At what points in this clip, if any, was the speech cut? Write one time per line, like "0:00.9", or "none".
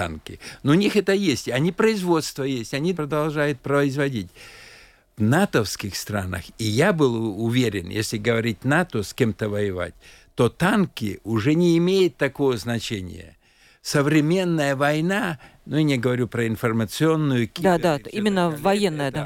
0:02.9